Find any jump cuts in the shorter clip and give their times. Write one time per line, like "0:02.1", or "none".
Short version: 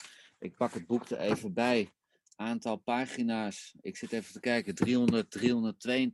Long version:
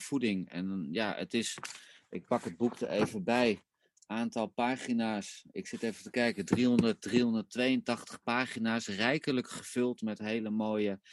none